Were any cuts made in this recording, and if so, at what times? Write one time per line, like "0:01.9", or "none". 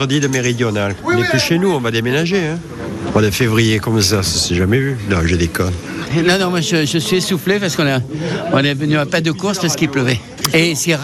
none